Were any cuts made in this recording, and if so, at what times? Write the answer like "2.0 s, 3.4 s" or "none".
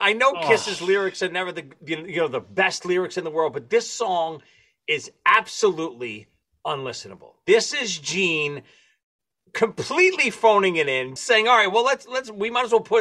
11.2 s